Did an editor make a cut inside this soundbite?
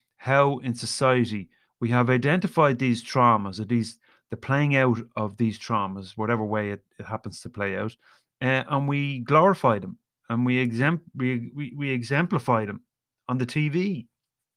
no; 0 cuts

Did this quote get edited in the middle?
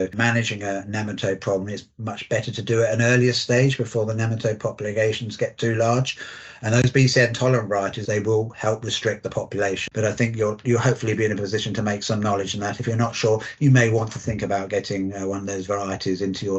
yes; 2 cuts; at 8.1 s, 9.9 s

